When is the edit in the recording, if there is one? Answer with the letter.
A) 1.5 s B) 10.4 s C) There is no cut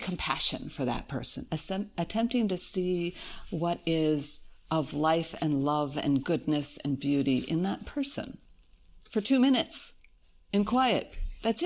A